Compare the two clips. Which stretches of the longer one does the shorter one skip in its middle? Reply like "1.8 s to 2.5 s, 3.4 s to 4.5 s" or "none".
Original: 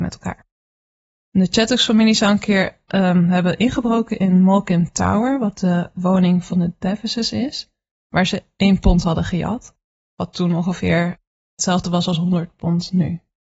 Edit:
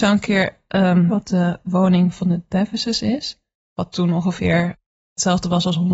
3.3 s to 5.4 s, 7.8 s to 9.9 s